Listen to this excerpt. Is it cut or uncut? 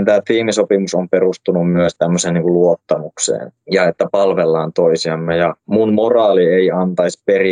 uncut